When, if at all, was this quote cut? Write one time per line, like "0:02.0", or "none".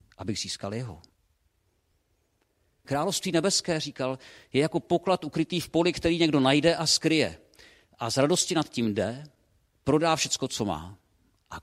0:02.8
0:09.7